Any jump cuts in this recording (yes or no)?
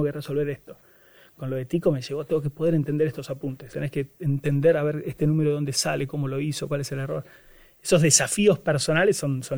yes